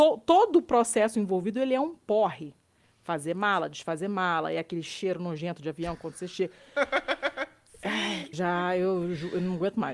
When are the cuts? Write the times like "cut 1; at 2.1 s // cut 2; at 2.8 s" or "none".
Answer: cut 1; at 8.3 s